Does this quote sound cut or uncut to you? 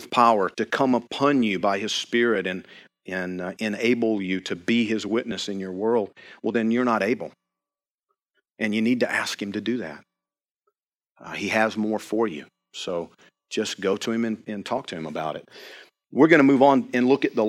uncut